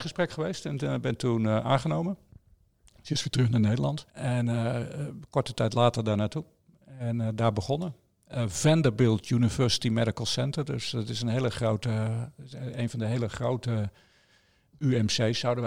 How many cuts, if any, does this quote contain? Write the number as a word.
one